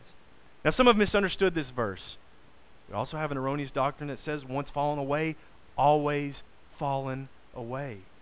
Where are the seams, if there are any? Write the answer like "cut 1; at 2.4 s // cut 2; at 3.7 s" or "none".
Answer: cut 1; at 2.8 s